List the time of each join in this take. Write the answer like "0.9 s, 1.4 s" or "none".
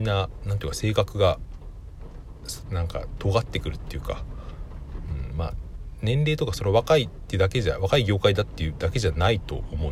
none